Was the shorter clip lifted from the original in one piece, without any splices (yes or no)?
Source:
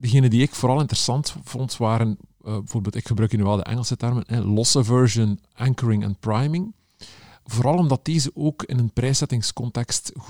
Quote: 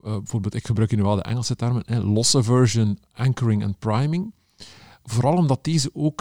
yes